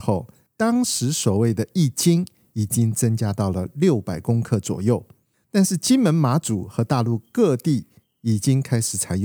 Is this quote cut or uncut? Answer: cut